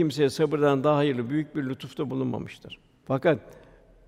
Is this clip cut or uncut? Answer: cut